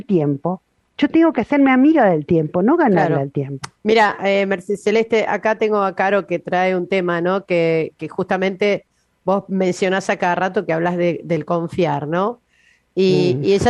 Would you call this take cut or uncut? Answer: uncut